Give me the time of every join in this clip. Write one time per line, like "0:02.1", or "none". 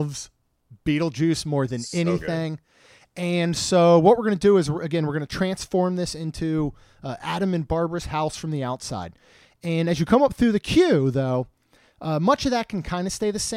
none